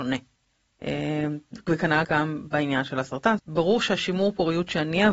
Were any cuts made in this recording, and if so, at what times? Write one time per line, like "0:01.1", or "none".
0:02.0
0:03.4